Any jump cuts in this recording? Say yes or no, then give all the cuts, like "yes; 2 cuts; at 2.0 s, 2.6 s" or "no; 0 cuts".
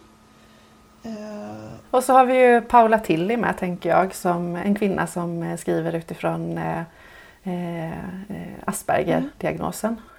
yes; 1 cut; at 1.8 s